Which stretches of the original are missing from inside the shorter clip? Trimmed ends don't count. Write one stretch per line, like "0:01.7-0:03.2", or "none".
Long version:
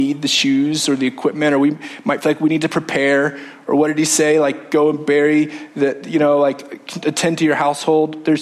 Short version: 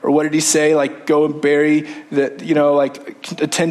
none